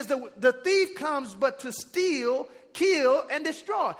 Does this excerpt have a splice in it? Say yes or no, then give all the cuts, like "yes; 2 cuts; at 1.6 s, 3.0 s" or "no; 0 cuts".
no; 0 cuts